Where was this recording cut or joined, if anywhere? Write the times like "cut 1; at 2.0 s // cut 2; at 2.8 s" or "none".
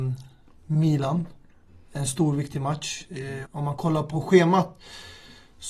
cut 1; at 3.5 s